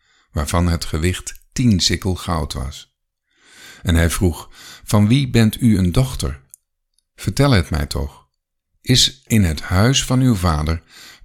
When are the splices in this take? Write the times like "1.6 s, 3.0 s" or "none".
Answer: 9.3 s